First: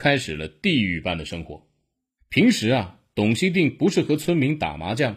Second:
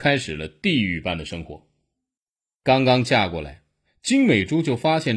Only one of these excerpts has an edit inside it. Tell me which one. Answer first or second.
first